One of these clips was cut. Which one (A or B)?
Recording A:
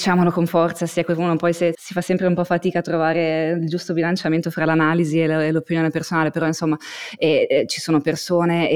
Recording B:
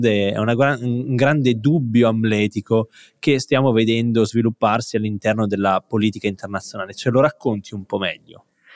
A